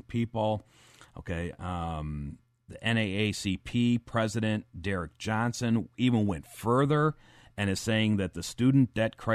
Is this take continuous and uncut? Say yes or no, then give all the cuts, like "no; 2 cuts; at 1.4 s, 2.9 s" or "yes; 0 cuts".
yes; 0 cuts